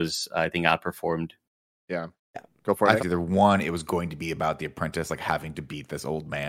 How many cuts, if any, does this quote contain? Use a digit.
1